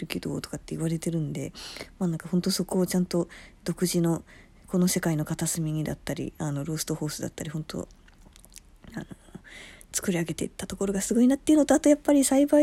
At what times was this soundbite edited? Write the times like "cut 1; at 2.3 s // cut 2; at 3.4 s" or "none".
none